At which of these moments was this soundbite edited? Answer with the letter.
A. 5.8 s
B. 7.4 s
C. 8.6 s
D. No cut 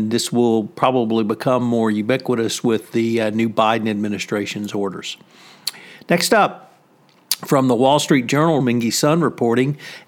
C